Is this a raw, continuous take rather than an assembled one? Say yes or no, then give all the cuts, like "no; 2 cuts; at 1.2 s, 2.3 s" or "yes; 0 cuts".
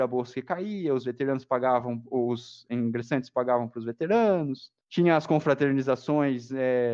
no; 1 cut; at 4.8 s